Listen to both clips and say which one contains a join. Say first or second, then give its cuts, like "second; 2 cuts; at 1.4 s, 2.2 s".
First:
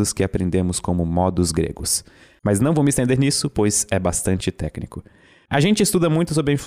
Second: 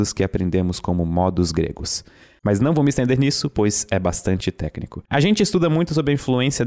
second; 1 cut; at 5.1 s